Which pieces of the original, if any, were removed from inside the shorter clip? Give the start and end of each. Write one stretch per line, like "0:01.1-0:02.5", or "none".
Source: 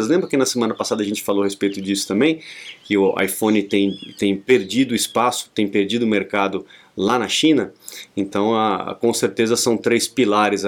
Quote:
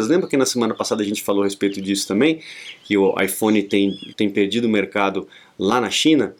0:04.1-0:05.5